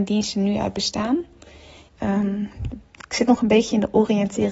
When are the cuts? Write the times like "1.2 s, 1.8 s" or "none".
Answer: 1.9 s